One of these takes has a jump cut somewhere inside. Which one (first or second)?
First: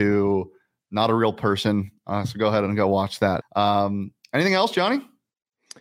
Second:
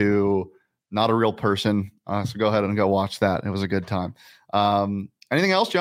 first